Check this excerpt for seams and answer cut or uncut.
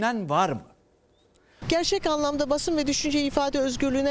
cut